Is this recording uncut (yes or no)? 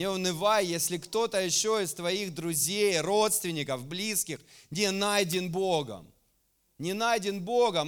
yes